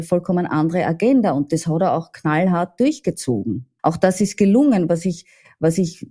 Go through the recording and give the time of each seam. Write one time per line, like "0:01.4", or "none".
0:03.8